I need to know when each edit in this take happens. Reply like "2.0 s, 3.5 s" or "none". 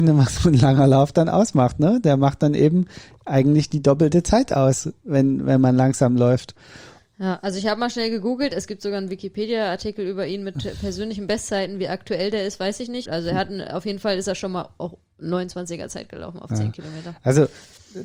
13.1 s